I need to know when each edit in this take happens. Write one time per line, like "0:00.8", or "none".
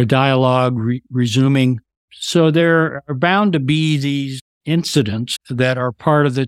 0:02.0
0:05.4